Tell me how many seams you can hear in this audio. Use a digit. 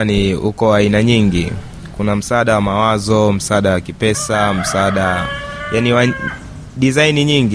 0